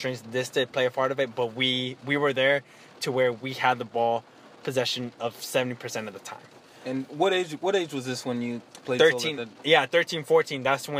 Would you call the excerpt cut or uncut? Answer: uncut